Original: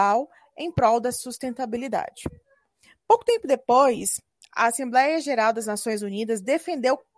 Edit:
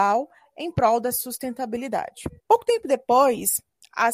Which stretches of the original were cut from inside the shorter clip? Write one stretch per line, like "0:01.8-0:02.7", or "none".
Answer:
0:02.4-0:03.0